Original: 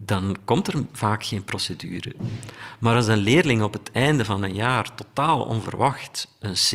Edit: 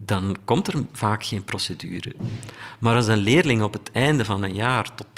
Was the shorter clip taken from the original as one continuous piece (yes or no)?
yes